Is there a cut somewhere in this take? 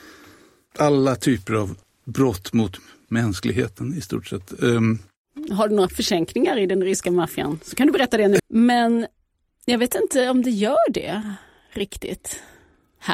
yes; 1 cut; at 8.4 s

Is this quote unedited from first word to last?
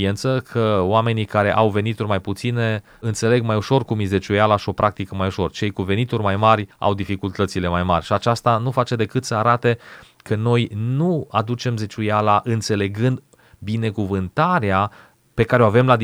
yes; 0 cuts

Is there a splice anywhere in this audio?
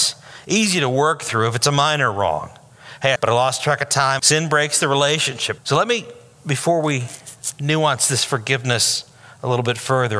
yes; 3 cuts; at 3.2 s, 4.2 s, 5.6 s

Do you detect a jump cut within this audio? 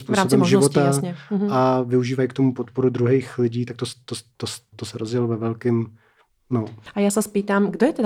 yes; 1 cut; at 4.7 s

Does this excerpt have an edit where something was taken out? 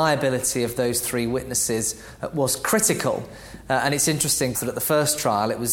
yes; 1 cut; at 4.5 s

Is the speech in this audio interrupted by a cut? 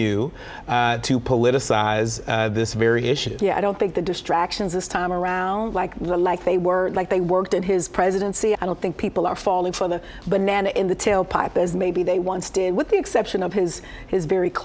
yes; 1 cut; at 8.6 s

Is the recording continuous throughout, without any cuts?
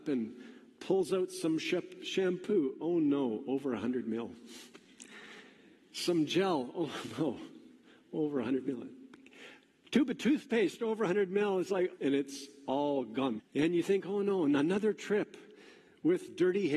no; 2 cuts; at 12.0 s, 13.4 s

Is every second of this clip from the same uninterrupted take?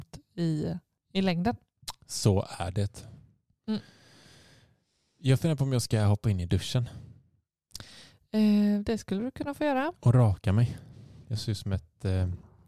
yes; 0 cuts

